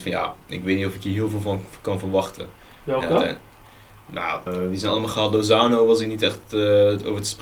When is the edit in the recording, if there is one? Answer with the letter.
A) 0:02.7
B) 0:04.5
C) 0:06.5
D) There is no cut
B